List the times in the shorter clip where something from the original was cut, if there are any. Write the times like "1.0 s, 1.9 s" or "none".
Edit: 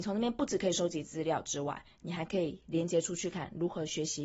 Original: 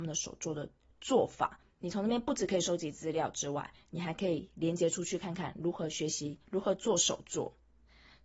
3.3 s